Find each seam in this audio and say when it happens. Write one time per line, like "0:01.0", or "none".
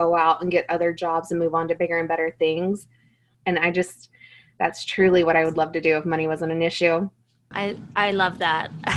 0:03.3
0:07.5

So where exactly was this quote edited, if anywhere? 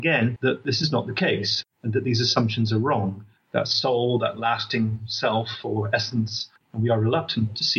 0:01.6
0:03.4
0:06.6

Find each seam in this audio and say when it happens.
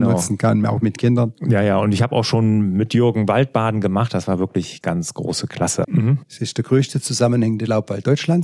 0:04.8
0:05.8

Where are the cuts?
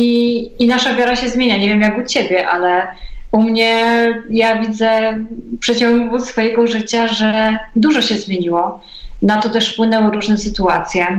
none

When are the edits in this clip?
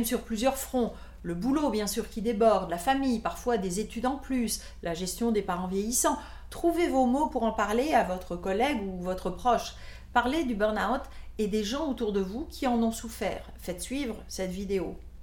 0:06.5

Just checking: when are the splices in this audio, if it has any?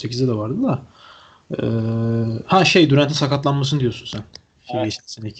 none

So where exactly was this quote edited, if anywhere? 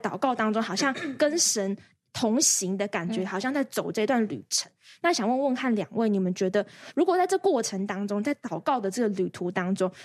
none

